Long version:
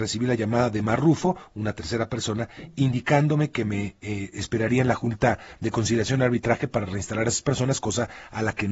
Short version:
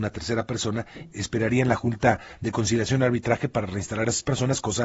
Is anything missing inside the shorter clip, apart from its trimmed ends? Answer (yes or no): yes